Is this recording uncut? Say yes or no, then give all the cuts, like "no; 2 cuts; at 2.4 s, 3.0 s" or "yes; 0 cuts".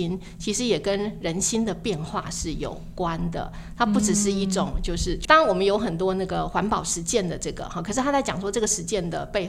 no; 1 cut; at 5.2 s